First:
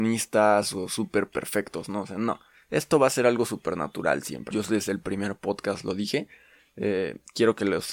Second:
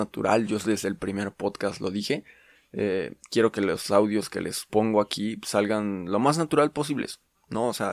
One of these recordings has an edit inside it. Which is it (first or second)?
first